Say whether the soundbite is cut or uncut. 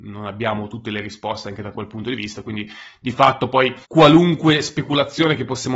cut